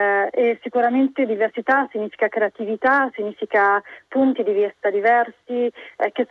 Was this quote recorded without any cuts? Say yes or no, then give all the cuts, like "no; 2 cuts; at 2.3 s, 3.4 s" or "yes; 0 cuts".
no; 1 cut; at 3.1 s